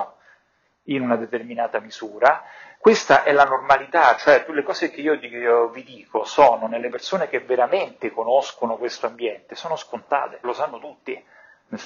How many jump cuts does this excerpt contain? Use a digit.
2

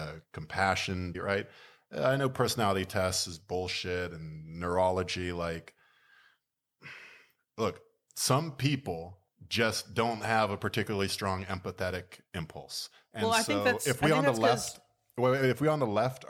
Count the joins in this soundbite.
1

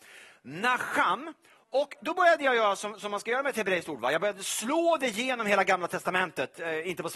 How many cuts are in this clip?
0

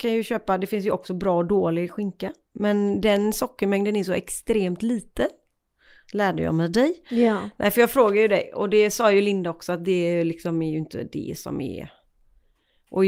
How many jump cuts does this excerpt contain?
0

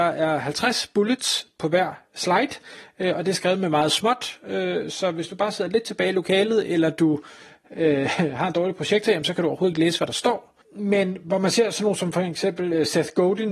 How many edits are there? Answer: 1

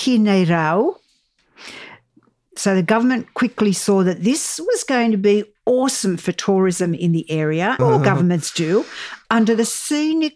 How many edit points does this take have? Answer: 2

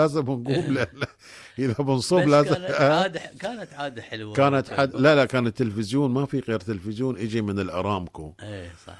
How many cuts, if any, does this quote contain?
1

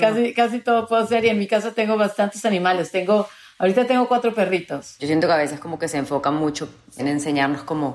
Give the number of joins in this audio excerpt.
2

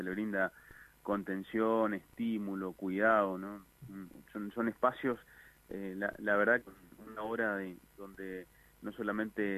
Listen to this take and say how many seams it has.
2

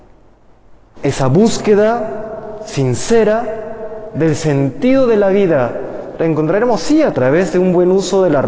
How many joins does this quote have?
2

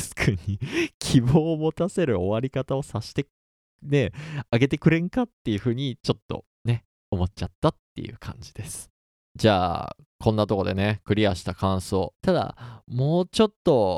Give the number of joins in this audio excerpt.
2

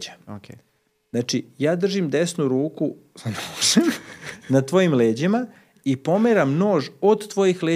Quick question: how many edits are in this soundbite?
0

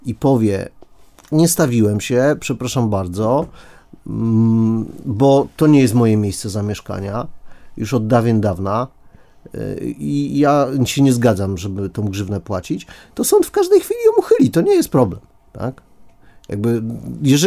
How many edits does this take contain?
0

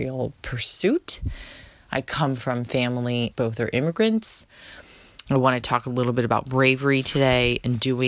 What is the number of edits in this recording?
2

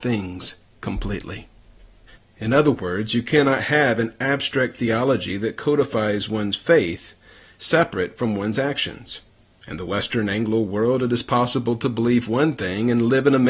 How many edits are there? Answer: 1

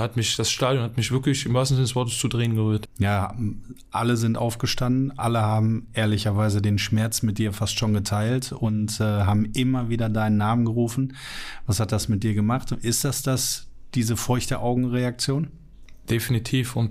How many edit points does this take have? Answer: 1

